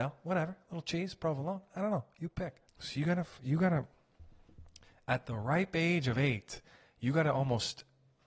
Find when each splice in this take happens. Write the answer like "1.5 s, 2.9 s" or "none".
2.7 s